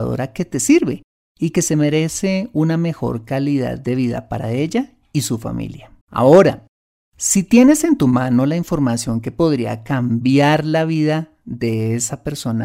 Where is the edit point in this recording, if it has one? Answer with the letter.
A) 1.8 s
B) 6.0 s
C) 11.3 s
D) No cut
B